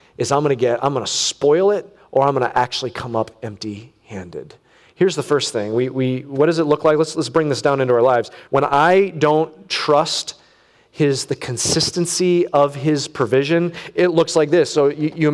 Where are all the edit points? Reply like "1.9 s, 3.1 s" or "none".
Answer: none